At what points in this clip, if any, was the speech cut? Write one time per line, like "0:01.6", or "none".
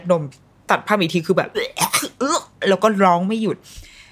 0:01.5